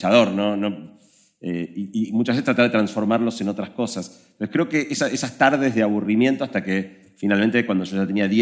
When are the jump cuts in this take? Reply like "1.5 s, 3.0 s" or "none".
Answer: none